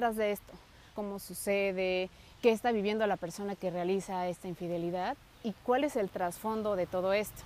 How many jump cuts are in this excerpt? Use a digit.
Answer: 2